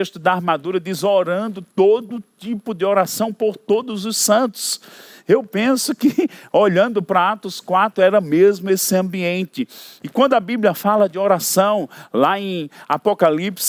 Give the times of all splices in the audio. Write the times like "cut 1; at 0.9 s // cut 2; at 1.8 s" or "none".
none